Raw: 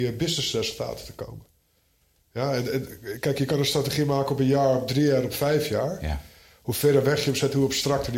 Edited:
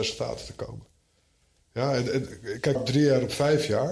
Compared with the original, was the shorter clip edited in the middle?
yes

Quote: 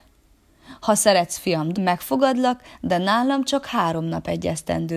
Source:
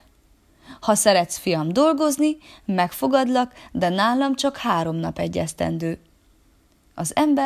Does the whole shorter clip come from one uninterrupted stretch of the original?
no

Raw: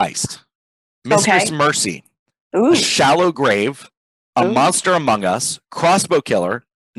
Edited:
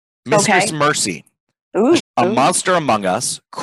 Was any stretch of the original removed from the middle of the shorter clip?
yes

